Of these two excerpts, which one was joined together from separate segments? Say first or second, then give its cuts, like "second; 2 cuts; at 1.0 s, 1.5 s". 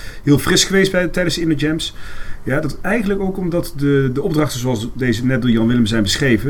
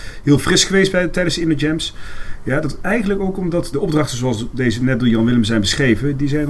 second; 1 cut; at 3.7 s